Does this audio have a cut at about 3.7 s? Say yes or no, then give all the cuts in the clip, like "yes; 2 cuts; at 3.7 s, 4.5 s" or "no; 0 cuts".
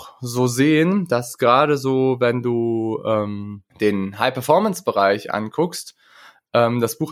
yes; 1 cut; at 3.7 s